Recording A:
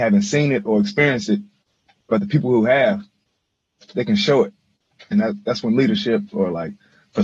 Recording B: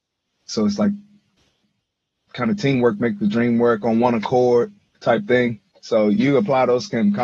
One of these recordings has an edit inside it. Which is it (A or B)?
B